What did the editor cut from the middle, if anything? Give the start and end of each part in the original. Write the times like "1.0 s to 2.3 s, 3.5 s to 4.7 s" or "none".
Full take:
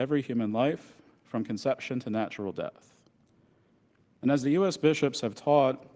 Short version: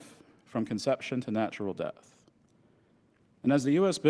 none